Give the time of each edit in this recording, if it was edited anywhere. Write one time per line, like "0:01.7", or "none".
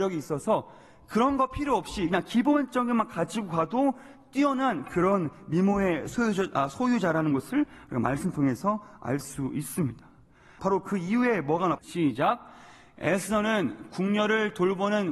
0:10.6
0:11.8